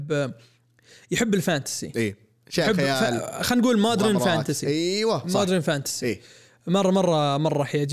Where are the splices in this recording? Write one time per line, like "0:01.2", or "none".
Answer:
none